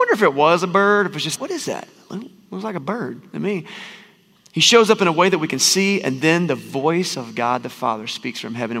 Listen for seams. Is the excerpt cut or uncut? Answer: cut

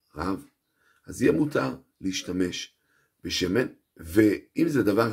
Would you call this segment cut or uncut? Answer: cut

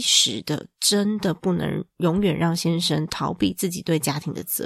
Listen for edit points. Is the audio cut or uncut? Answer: uncut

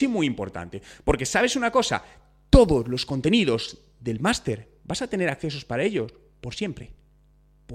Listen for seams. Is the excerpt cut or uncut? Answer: cut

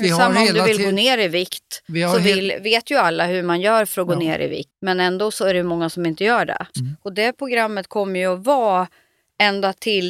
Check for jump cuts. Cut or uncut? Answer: cut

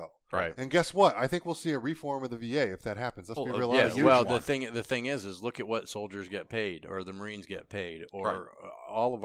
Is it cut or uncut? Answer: uncut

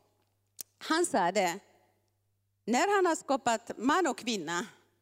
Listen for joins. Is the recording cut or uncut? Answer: uncut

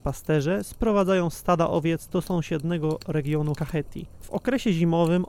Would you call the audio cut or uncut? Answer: uncut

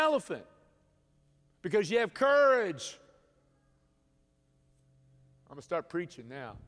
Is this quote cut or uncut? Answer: uncut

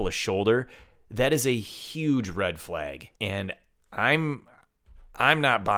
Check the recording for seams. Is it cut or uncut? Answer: cut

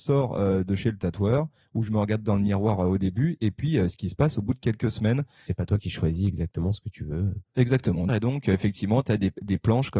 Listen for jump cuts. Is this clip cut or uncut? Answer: cut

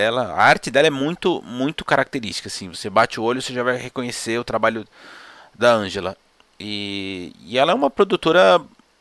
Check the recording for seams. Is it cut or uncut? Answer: uncut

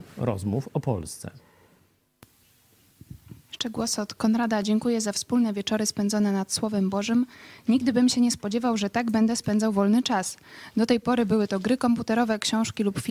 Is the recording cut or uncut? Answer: uncut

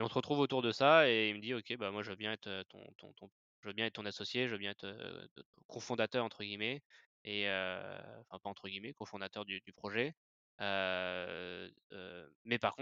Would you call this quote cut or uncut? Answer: uncut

